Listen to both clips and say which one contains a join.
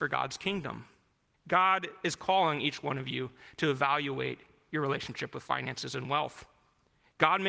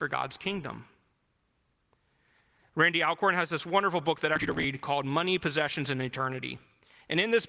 first; 1 cut; at 1.3 s

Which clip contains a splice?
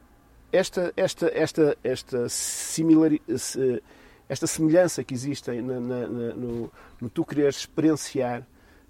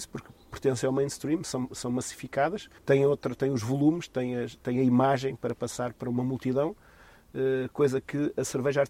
second; 1 cut; at 2.8 s

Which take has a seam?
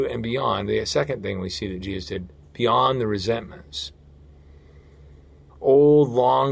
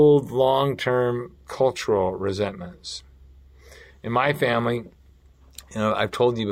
first; 1 cut; at 5.5 s

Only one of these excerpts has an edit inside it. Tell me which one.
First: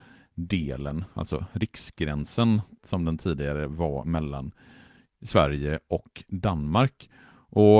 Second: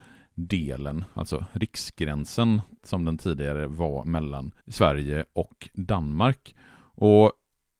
second; 1 cut; at 4.6 s

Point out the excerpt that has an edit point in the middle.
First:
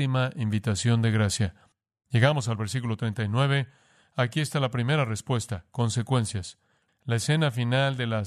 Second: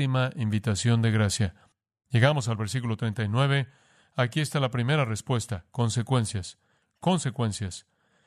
first; 1 cut; at 6.9 s

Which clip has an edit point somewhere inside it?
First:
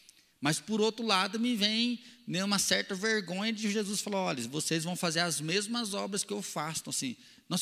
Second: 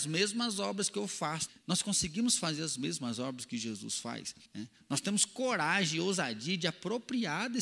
second; 2 cuts; at 1.5 s, 4.5 s

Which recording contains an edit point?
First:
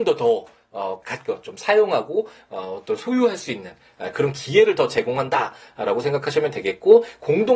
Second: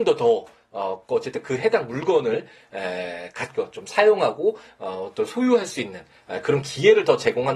first; 1 cut; at 1.0 s

